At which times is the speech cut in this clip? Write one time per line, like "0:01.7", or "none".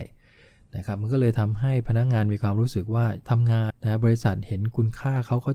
0:03.7